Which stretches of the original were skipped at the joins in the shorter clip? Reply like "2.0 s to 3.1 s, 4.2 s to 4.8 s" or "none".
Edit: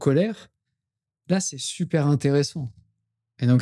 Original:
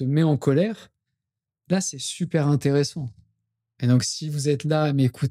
none